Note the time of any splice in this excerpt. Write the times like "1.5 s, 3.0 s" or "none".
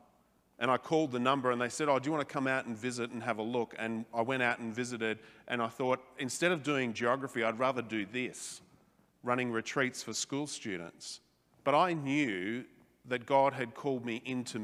11.5 s